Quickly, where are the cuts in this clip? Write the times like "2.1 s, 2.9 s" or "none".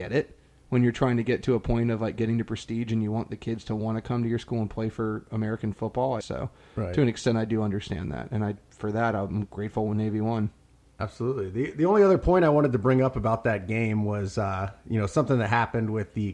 6.2 s